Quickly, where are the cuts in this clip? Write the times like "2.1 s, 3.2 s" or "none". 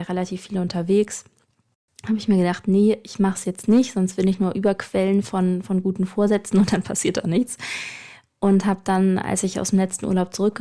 none

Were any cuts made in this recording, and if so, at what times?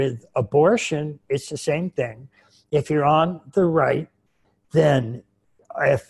none

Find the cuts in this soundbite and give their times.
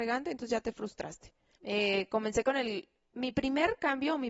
1.5 s

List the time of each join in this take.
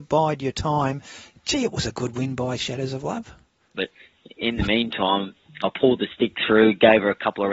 3.7 s

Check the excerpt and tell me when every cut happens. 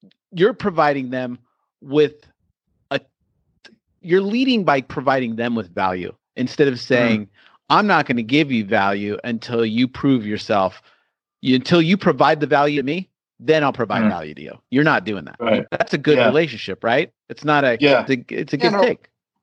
15.7 s, 18.1 s

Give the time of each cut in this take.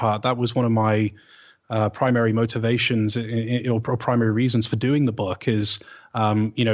none

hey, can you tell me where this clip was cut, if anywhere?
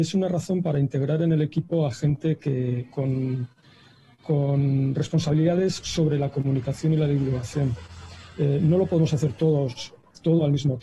none

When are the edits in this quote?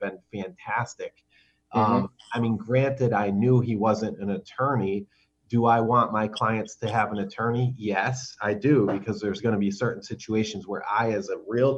none

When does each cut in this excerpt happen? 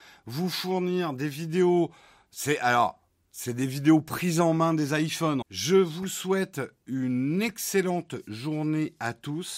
5.4 s

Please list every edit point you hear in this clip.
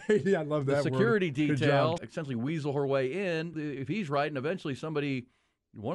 2.0 s, 3.5 s

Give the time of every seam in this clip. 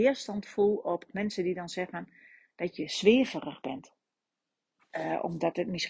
4.8 s

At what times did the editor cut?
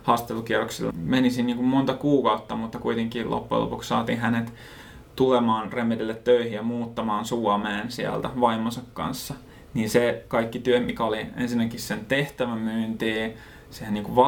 0.9 s

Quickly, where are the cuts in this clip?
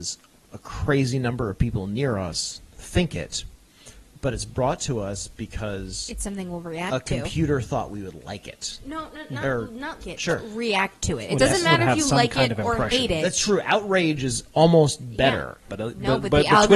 10.0 s, 15.7 s

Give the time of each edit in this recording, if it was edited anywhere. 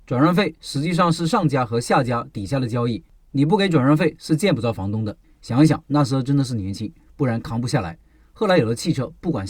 5.2 s

